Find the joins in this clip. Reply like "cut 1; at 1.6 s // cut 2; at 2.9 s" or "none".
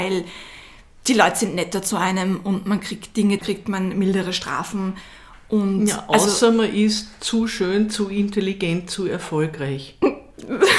cut 1; at 3.4 s